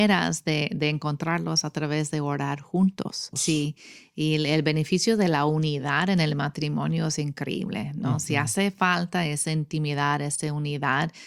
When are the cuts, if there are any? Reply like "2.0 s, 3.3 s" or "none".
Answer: 3.3 s

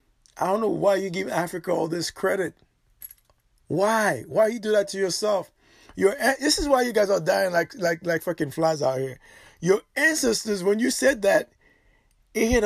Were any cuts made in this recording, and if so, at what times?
none

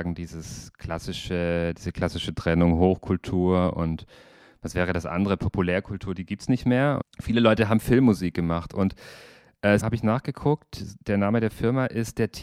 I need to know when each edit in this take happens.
7.0 s, 9.8 s

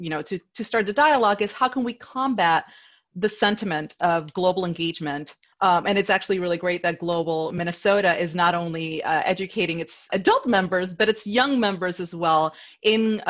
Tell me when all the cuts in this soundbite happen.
5.5 s, 10.1 s

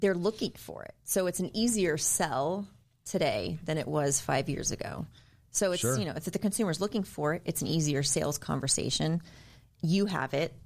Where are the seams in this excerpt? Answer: none

